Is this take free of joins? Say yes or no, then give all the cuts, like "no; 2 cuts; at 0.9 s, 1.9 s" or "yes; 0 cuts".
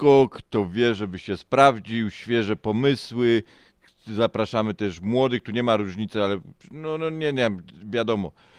yes; 0 cuts